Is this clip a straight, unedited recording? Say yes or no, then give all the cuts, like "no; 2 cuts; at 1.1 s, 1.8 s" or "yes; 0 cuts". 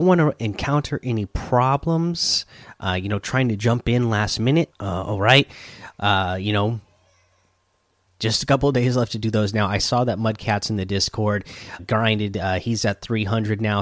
no; 3 cuts; at 4.7 s, 8.1 s, 11.8 s